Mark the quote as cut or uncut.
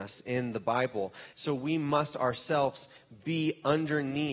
cut